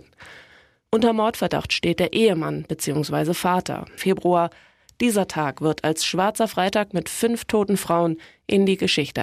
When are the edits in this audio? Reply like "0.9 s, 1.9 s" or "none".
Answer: 4.0 s